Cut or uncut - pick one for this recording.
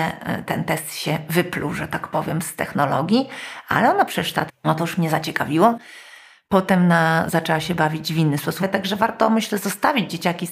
cut